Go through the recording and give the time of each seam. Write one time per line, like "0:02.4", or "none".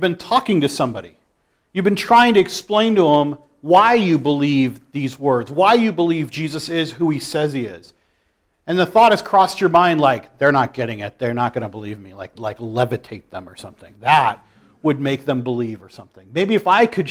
0:12.3